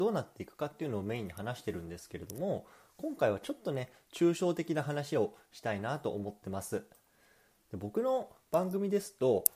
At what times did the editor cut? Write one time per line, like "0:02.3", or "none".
0:07.5